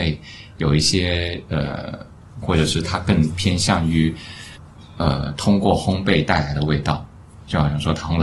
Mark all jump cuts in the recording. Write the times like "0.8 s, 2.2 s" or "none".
2.4 s

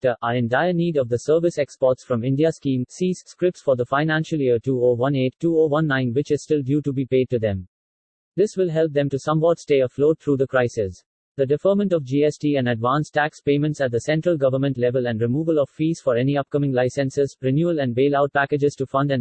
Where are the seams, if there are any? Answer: 17.4 s

